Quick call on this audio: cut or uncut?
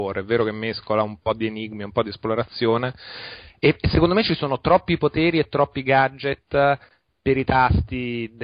uncut